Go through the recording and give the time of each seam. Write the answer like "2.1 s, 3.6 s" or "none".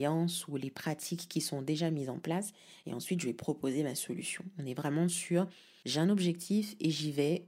none